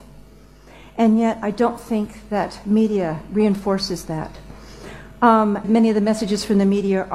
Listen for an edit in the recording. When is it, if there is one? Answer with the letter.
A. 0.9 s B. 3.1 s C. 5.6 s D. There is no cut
C